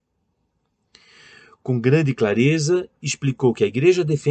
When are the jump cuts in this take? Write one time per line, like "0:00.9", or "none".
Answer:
none